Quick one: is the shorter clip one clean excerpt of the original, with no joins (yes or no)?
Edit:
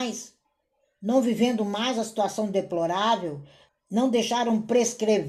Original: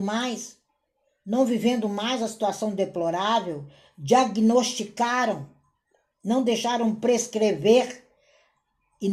no